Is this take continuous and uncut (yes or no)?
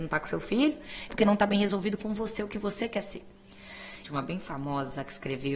no